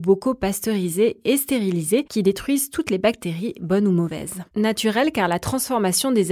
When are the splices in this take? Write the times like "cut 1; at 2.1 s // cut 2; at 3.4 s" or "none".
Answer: cut 1; at 4.5 s